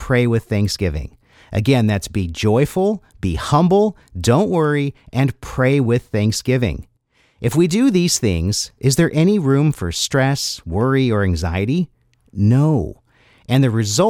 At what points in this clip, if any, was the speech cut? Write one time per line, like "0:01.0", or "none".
none